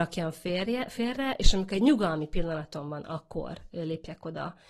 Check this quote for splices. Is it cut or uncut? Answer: uncut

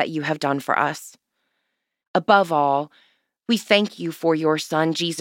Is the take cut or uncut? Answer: cut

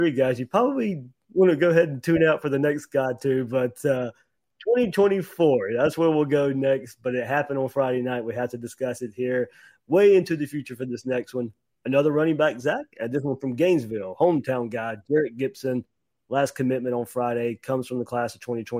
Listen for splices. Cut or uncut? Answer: uncut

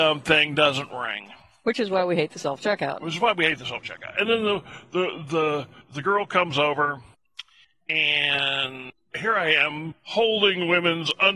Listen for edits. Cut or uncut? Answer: uncut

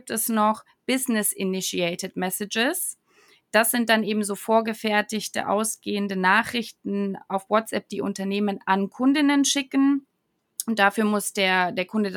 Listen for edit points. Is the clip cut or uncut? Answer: uncut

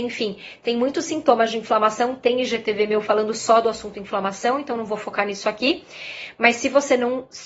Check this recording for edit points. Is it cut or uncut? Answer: uncut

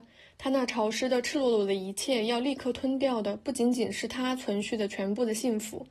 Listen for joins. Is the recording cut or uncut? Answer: uncut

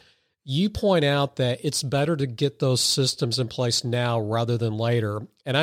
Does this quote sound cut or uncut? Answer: uncut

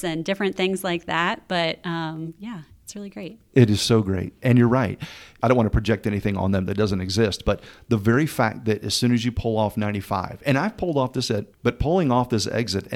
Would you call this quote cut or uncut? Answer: cut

